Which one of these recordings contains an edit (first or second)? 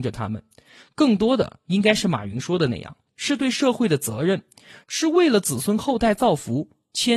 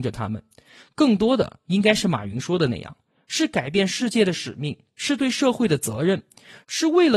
first